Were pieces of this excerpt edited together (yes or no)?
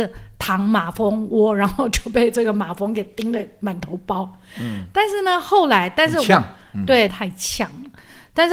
yes